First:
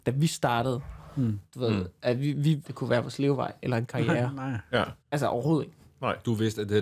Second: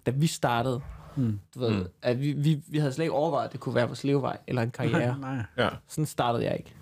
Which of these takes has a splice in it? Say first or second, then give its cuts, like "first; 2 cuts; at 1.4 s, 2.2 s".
first; 2 cuts; at 2.6 s, 5.0 s